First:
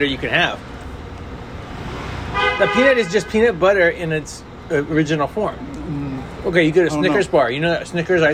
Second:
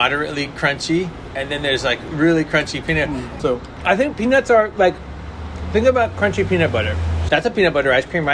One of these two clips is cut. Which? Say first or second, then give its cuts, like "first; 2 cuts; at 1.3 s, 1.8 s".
second; 2 cuts; at 3.4 s, 7.3 s